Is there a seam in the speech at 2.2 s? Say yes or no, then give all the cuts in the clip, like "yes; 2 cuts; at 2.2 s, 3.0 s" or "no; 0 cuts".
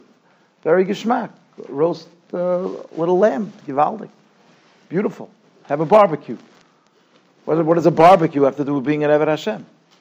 no; 0 cuts